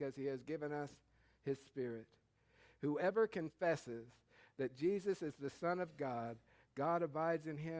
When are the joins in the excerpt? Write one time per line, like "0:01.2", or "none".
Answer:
none